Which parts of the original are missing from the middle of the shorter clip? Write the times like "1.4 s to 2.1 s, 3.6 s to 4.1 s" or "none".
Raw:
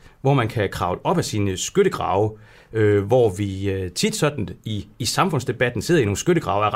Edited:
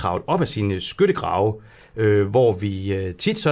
none